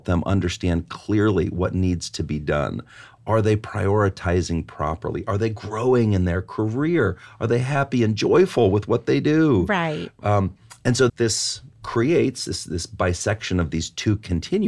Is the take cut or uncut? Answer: cut